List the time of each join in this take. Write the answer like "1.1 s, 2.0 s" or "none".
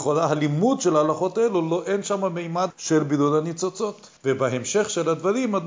2.7 s, 4.2 s